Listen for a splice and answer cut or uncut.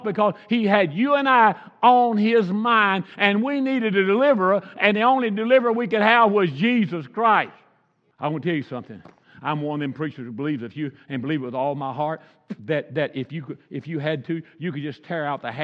uncut